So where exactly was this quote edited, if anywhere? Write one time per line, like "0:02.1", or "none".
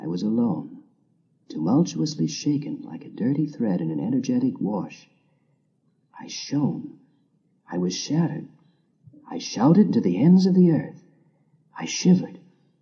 none